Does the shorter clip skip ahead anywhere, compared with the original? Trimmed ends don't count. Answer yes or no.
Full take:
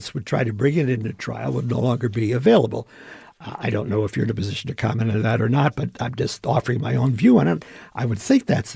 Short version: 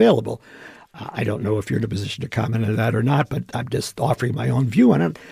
no